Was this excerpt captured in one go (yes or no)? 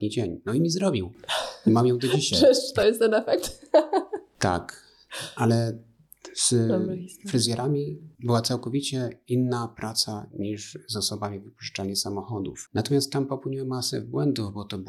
no